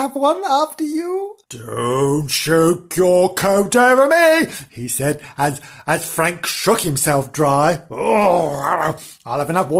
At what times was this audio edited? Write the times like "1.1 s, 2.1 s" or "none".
1.4 s